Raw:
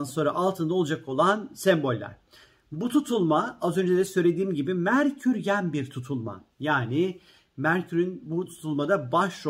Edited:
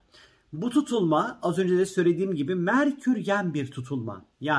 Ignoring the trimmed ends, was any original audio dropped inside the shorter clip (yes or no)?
no